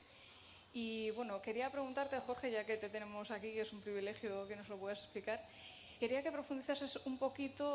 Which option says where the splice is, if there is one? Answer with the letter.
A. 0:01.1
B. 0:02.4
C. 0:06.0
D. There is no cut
C